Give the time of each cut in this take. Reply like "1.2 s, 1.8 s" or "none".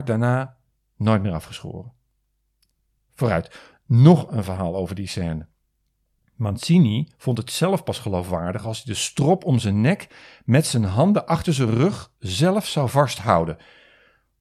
none